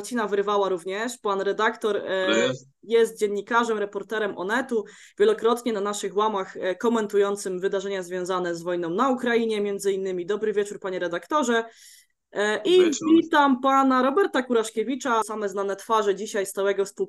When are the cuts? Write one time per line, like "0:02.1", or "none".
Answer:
0:15.2